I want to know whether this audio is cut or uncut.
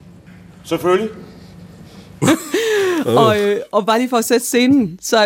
cut